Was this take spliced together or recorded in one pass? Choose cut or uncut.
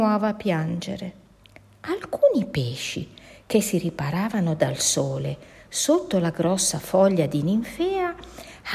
uncut